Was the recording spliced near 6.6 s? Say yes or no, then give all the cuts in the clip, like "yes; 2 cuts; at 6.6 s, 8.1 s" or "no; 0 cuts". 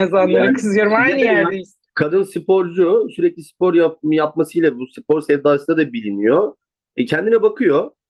no; 0 cuts